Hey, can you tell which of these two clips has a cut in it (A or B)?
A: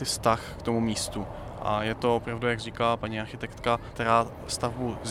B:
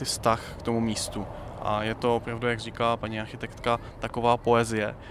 A